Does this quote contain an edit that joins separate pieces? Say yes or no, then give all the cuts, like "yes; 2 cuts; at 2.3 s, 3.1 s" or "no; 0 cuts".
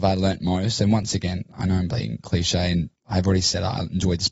no; 0 cuts